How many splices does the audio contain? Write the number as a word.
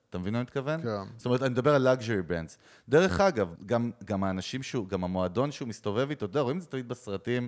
one